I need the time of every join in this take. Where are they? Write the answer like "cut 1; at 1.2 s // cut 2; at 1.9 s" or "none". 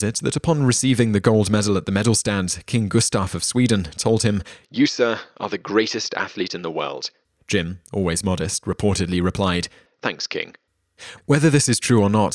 none